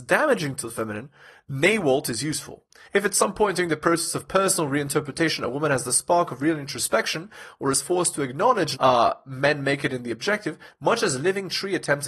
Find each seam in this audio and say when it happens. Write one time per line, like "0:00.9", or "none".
0:02.9
0:08.8
0:10.7